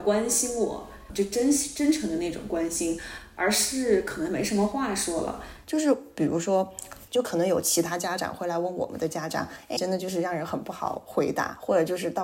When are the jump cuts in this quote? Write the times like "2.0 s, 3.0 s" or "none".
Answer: 5.6 s, 7.1 s, 9.8 s